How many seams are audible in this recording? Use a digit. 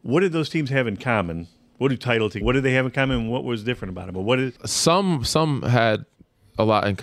1